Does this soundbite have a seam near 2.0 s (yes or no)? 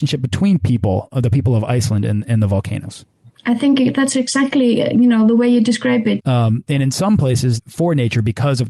no